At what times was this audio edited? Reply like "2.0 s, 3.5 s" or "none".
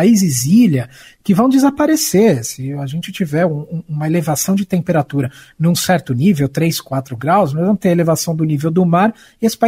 none